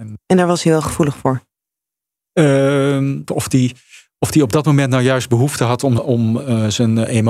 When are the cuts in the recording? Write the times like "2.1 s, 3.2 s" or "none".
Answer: 3.3 s, 6.0 s